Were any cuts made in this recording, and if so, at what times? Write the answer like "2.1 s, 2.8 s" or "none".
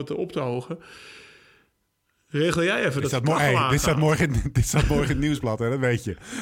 none

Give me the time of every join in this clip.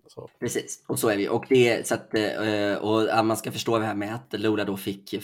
none

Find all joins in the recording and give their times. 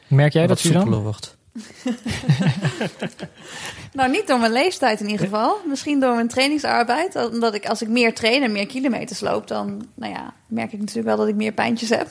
none

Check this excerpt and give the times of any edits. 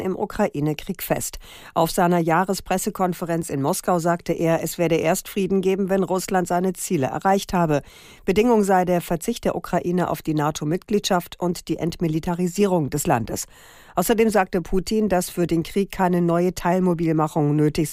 none

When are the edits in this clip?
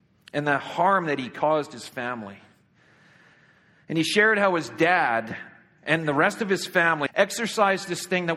7.1 s

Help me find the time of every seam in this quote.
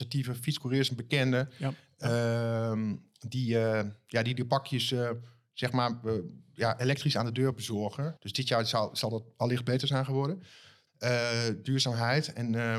8.2 s, 10.9 s

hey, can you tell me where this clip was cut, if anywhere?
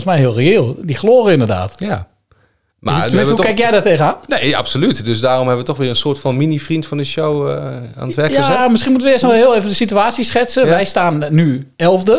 none

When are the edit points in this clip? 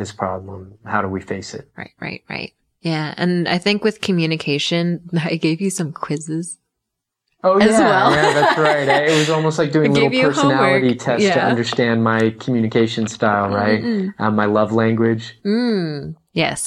none

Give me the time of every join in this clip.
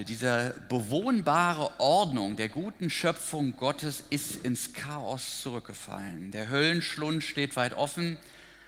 none

